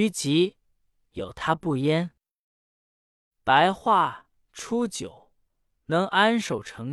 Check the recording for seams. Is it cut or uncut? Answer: uncut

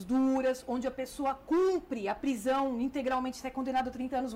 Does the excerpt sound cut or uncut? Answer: uncut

